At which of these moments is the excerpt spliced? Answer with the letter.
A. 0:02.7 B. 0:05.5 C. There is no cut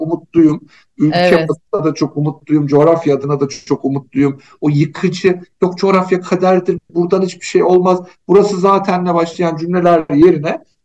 C